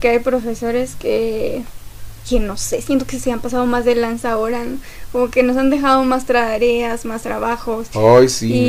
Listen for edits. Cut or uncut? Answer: uncut